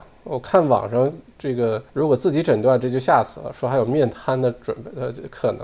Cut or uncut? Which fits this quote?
cut